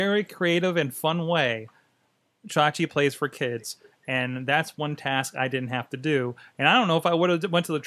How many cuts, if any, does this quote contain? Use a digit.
0